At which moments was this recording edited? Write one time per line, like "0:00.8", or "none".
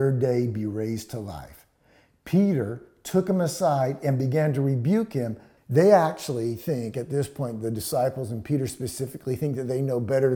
0:05.6